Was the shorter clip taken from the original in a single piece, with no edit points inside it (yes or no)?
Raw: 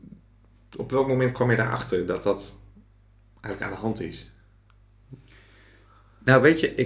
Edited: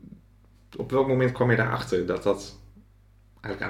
yes